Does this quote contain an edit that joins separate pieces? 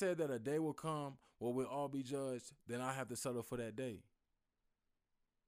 no; 0 cuts

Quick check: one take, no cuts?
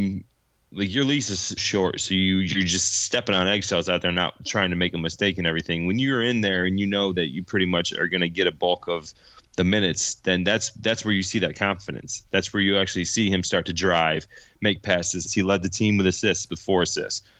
no; 2 cuts; at 1.6 s, 15.3 s

